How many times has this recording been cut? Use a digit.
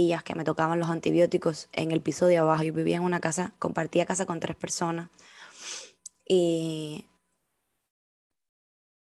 0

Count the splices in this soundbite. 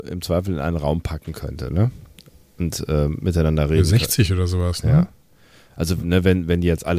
0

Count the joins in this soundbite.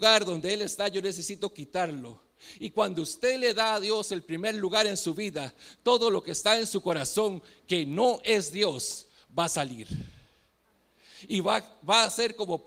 0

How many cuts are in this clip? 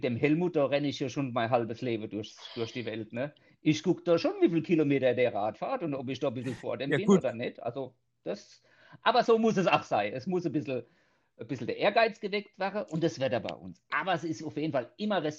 0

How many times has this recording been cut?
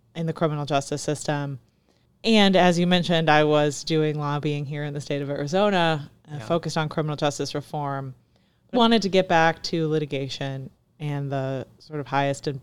1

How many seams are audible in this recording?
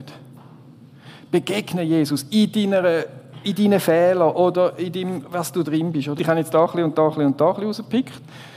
1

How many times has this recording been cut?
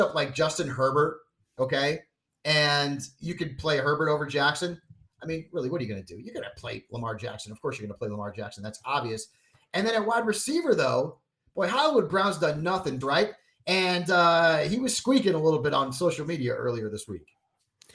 1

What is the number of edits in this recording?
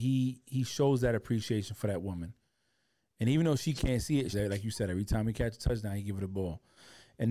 1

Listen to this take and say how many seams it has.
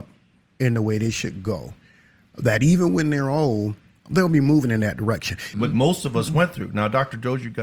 1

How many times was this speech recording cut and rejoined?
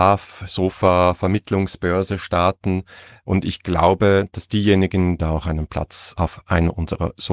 1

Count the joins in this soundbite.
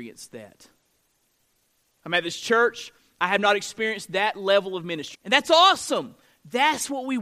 1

